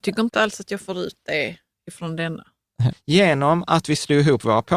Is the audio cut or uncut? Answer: cut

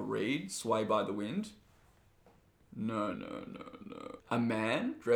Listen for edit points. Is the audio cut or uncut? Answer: cut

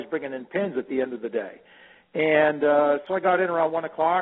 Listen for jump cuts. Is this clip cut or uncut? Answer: uncut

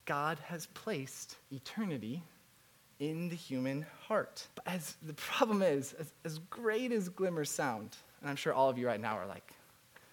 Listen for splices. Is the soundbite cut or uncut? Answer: cut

